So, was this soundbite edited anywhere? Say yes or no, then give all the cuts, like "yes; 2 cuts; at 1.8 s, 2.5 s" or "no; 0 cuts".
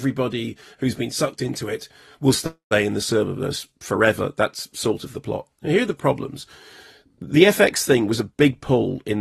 no; 0 cuts